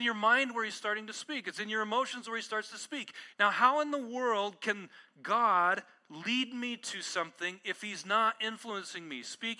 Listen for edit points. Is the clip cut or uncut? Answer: cut